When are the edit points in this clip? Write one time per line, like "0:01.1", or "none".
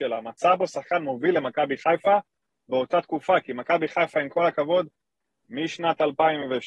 none